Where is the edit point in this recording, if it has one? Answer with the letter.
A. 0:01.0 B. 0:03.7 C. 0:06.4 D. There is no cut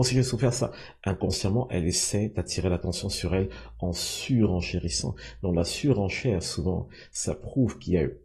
D